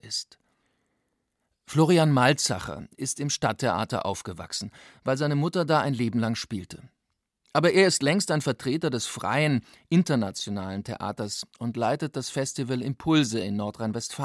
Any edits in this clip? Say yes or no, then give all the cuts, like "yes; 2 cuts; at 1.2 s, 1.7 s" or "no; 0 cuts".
no; 0 cuts